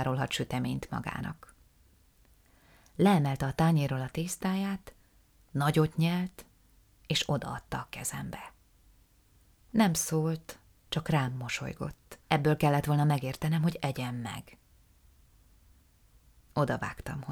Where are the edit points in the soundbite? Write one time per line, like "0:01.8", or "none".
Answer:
none